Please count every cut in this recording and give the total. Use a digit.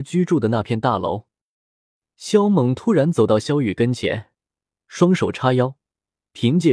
0